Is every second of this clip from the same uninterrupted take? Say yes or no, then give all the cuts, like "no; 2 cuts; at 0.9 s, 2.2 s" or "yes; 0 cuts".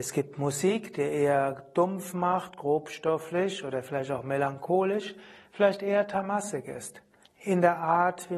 no; 1 cut; at 7.3 s